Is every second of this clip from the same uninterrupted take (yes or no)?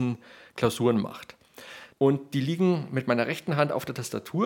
no